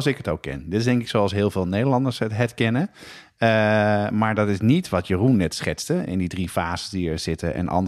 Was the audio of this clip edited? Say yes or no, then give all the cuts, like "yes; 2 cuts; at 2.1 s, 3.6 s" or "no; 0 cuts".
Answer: no; 0 cuts